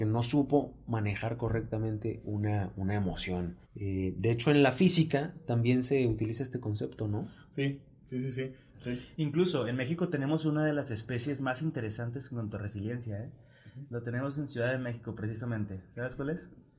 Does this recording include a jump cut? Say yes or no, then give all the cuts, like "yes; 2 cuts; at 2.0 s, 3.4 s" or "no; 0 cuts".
yes; 2 cuts; at 3.6 s, 8.7 s